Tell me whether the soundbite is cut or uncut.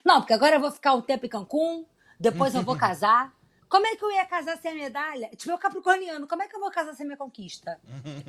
uncut